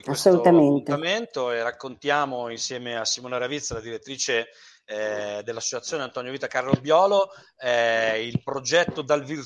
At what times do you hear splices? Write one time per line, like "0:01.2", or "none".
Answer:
none